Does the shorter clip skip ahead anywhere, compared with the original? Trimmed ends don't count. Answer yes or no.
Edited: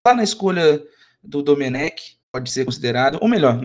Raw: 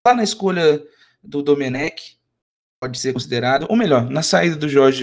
yes